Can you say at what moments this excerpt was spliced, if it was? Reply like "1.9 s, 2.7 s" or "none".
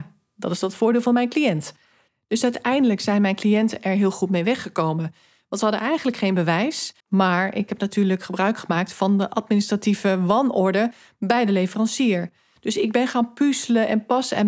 7.0 s, 12.6 s